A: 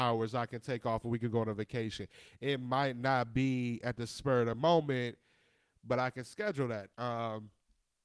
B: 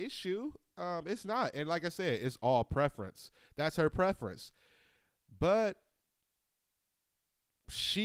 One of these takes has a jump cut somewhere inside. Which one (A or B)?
A